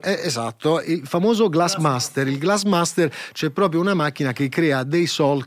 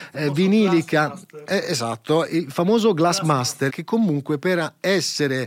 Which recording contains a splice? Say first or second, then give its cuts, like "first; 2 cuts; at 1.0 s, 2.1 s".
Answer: second; 1 cut; at 3.7 s